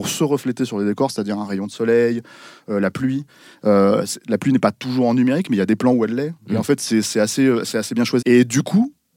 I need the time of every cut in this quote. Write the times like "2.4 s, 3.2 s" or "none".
8.2 s